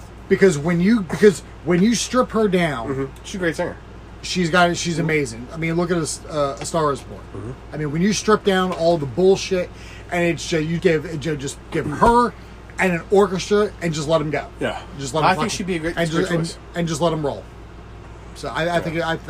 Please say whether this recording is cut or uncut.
cut